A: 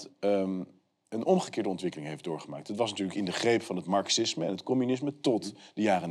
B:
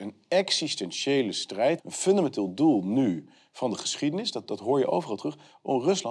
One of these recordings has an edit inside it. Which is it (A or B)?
B